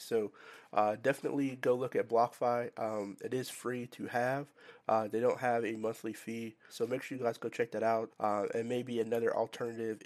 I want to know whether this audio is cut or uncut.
cut